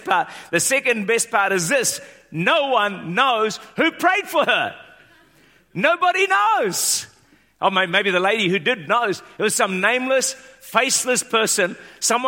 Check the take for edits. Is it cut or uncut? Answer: uncut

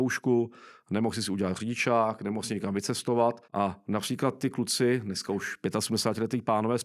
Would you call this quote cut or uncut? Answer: cut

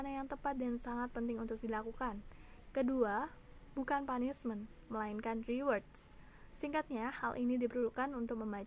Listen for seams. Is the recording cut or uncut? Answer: uncut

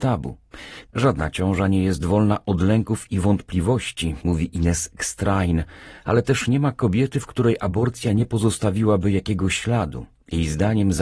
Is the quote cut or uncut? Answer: uncut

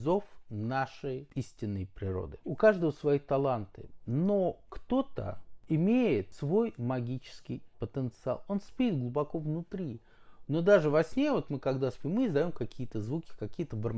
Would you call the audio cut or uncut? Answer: cut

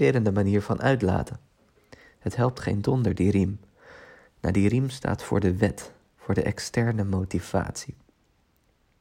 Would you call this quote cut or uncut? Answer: uncut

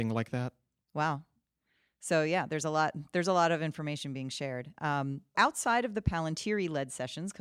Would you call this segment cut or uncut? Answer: cut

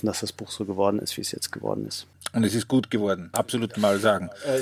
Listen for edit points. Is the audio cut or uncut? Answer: cut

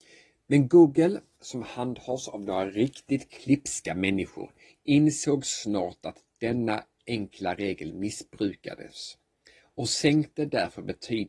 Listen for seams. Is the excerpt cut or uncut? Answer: uncut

